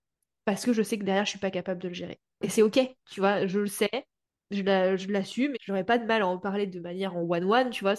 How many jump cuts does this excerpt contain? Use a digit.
2